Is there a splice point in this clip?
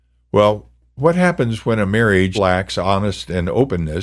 yes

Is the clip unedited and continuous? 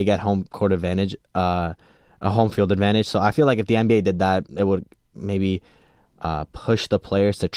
yes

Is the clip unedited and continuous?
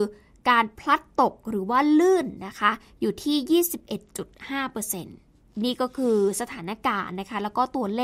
yes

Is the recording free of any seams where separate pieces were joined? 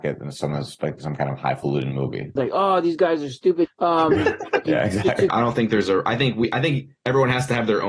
no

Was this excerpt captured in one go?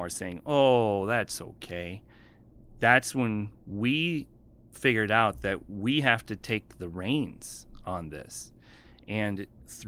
yes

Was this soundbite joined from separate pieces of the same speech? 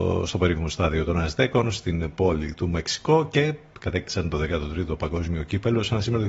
no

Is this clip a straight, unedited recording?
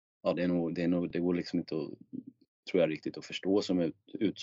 yes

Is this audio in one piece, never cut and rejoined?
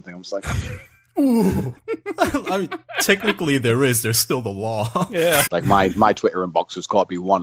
no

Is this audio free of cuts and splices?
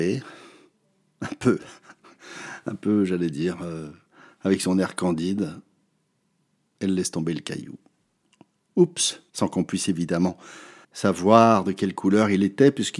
no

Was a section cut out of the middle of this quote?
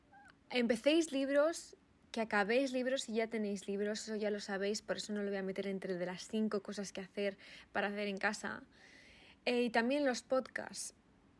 no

